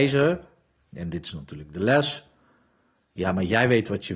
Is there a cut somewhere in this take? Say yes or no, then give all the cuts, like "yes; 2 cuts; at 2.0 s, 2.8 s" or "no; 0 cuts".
no; 0 cuts